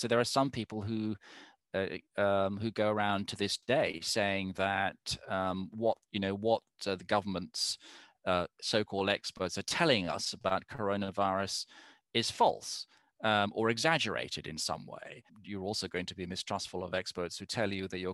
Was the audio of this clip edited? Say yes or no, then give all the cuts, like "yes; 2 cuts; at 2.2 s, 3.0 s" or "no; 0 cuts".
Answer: yes; 1 cut; at 15.3 s